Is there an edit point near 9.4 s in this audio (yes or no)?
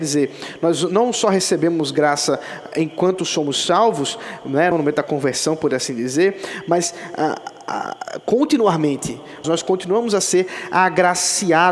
yes